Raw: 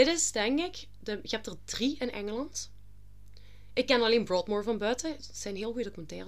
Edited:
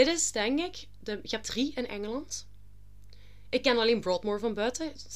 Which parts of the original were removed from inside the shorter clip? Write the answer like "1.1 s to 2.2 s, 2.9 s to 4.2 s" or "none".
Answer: 1.4 s to 1.7 s